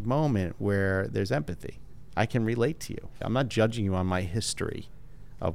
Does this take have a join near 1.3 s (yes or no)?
no